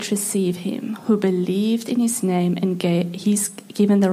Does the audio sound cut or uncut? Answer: uncut